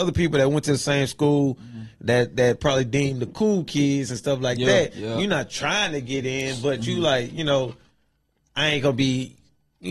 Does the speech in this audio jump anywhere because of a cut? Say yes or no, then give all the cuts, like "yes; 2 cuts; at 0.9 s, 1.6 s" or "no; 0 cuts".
no; 0 cuts